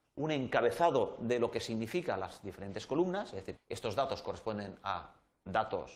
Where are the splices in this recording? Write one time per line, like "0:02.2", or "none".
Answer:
0:03.6